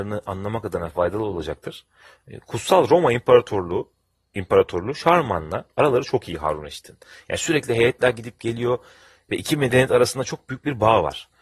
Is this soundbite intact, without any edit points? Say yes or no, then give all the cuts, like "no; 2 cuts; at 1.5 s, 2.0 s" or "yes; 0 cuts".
yes; 0 cuts